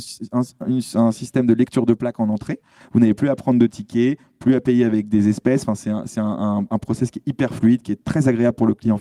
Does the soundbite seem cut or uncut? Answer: cut